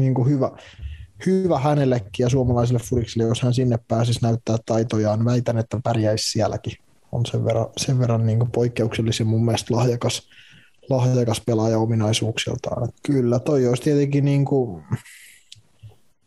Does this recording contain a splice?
yes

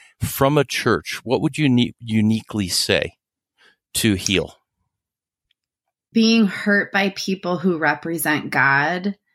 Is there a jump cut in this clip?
yes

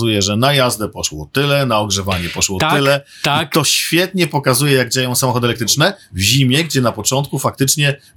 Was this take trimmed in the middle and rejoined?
no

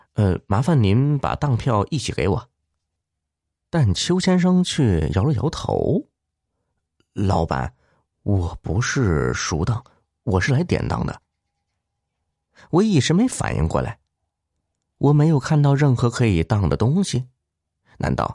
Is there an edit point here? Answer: no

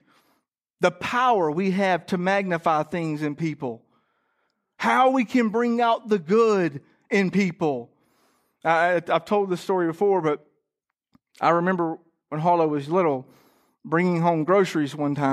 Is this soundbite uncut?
yes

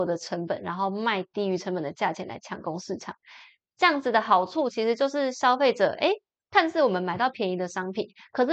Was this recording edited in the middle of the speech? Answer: no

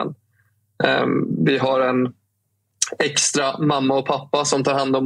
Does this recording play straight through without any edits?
yes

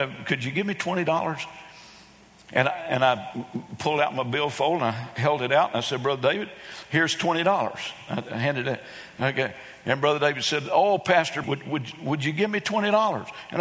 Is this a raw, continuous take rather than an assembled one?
no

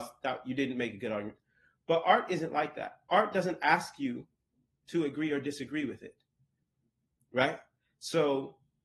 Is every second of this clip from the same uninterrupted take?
yes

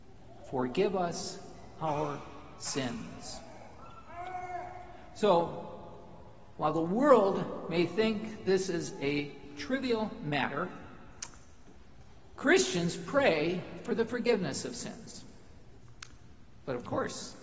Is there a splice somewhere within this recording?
yes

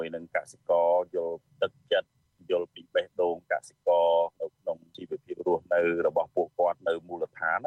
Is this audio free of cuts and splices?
yes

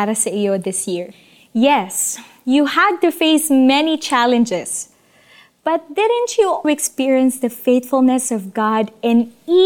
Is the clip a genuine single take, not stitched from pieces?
no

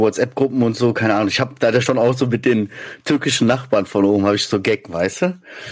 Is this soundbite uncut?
yes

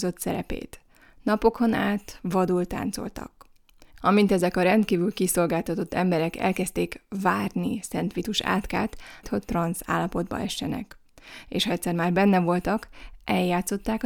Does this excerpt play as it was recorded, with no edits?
no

